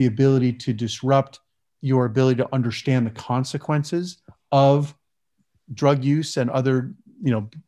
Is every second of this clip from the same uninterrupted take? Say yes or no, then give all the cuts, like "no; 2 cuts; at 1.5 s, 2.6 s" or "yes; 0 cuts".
yes; 0 cuts